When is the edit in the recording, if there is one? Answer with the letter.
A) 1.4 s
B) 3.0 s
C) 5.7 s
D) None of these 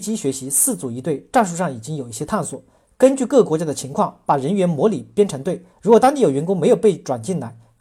C